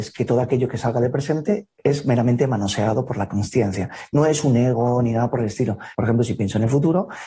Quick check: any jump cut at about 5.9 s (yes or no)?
yes